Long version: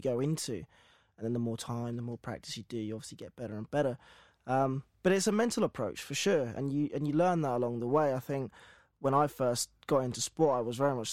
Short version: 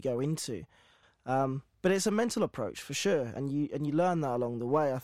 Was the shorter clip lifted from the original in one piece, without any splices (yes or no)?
no